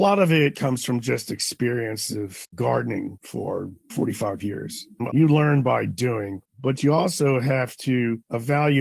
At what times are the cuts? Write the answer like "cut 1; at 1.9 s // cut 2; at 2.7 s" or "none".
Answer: cut 1; at 5.1 s // cut 2; at 6.5 s